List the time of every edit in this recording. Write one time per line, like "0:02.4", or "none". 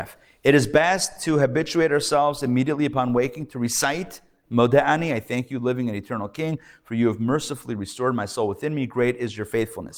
none